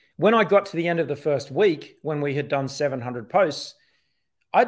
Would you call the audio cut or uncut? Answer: uncut